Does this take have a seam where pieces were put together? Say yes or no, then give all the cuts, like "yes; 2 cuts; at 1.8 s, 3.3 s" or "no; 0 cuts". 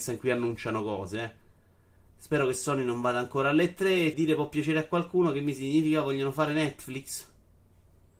yes; 1 cut; at 4.1 s